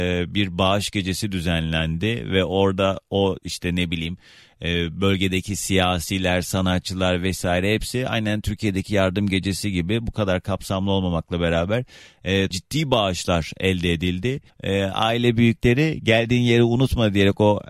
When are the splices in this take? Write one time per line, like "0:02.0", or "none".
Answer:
0:12.5
0:14.5